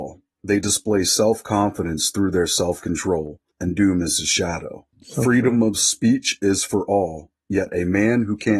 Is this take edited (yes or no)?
yes